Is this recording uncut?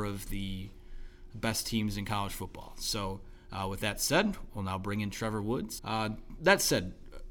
no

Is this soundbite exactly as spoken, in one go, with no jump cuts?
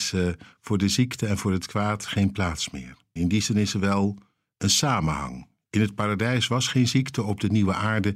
no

